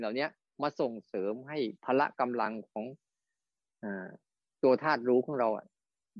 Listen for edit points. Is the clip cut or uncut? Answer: cut